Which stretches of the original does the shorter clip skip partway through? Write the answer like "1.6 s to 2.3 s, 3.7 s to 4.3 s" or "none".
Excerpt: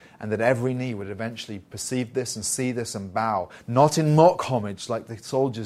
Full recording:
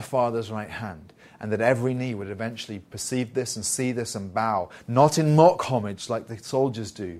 none